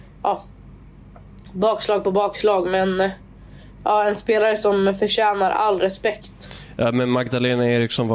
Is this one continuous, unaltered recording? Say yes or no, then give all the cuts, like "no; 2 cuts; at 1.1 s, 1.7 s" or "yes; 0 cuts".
yes; 0 cuts